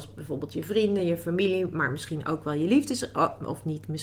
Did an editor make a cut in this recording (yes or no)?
no